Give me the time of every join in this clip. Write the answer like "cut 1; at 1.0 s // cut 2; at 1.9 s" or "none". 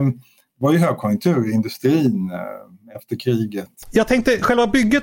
cut 1; at 3.8 s